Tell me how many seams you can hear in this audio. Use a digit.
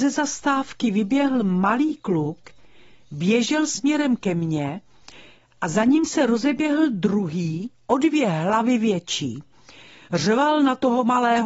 0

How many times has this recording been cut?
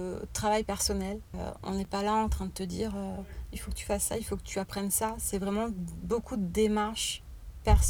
0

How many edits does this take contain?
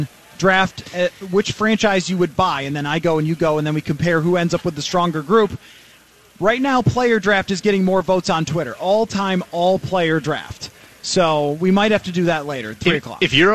0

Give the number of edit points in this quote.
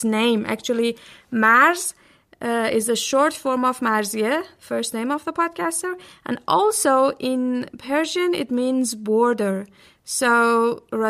0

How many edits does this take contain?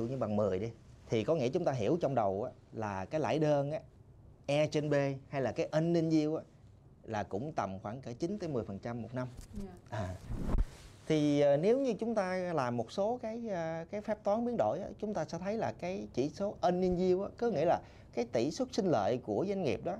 1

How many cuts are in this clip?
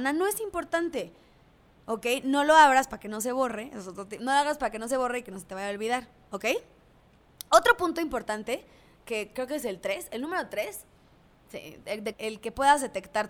1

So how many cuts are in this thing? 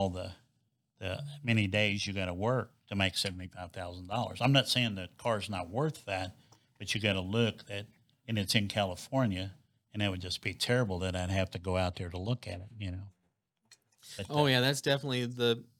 0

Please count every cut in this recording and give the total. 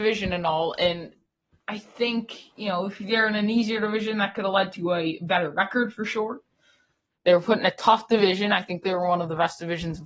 1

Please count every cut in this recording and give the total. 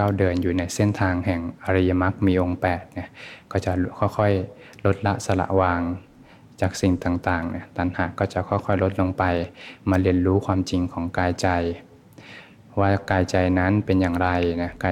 0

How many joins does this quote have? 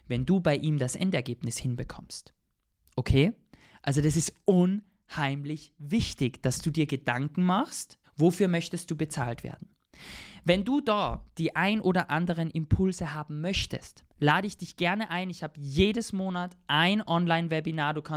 1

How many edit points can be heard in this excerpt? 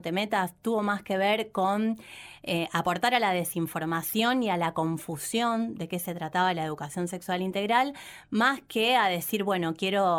0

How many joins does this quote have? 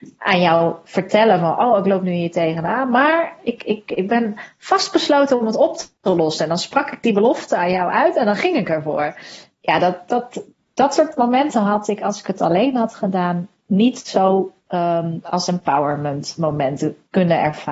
0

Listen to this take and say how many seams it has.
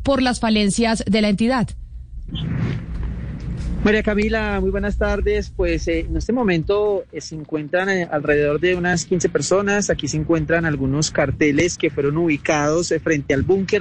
0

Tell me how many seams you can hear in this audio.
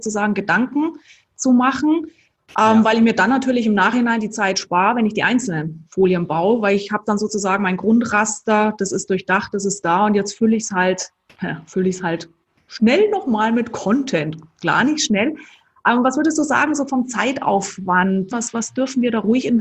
1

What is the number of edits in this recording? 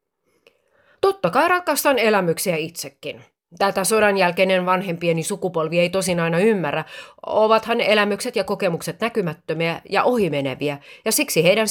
0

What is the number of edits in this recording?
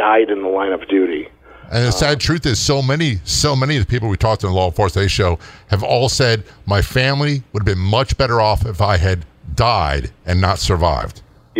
0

